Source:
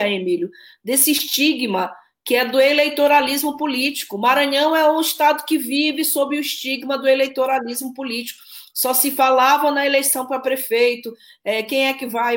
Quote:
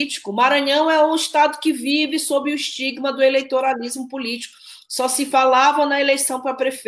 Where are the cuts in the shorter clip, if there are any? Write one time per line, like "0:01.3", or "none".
none